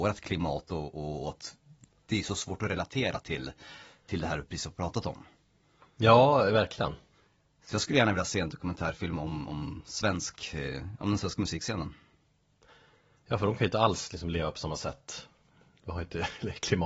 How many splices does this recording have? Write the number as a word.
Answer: zero